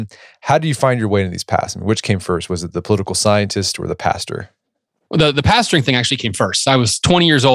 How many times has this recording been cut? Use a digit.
0